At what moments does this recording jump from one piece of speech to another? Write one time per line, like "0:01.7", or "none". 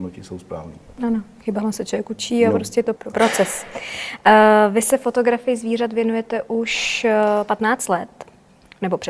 0:03.0